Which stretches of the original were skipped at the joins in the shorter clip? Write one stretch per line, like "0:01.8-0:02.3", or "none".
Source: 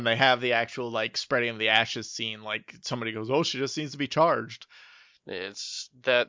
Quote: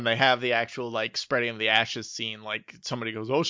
none